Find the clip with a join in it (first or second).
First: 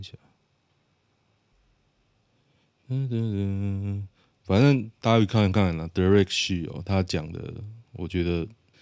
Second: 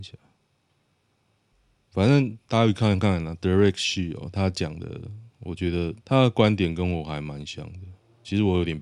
second